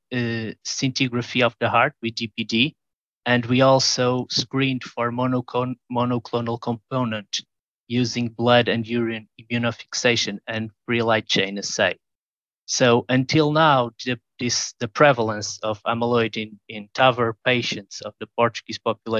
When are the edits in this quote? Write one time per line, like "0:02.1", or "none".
none